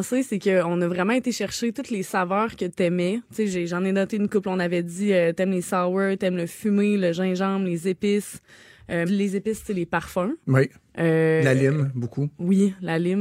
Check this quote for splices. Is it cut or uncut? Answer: cut